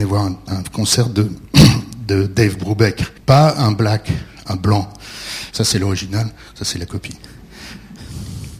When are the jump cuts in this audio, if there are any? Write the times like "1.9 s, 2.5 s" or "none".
3.2 s, 5.5 s